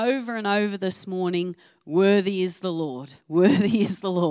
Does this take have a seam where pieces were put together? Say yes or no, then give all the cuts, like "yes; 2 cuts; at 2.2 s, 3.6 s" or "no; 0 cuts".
no; 0 cuts